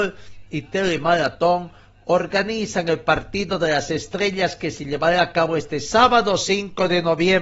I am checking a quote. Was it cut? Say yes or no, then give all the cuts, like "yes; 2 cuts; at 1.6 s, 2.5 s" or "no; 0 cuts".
no; 0 cuts